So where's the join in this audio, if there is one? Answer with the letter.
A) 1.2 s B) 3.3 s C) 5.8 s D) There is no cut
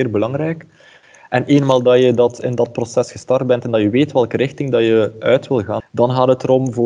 C